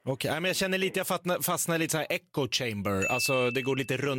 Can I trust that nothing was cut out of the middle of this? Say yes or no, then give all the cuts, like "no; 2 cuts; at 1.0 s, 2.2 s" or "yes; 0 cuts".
yes; 0 cuts